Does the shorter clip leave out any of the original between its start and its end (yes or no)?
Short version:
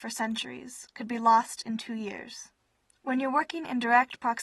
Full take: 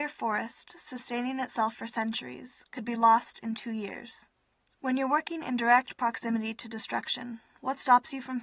no